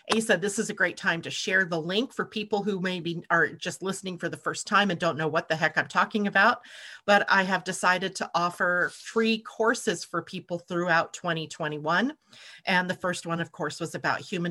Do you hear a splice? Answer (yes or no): no